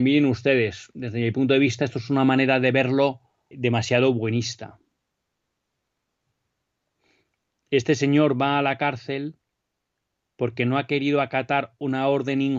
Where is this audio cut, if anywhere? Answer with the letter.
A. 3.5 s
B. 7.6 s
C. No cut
A